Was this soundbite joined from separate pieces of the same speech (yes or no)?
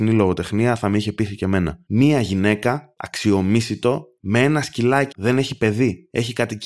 yes